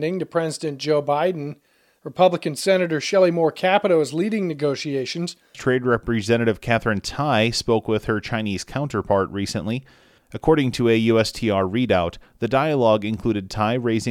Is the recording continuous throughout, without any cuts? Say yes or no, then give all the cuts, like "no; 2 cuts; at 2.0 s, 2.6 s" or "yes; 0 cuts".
no; 2 cuts; at 2.0 s, 5.5 s